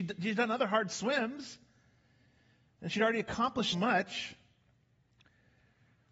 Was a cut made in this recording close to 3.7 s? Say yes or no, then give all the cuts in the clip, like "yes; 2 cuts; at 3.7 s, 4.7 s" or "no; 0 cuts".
yes; 1 cut; at 3.7 s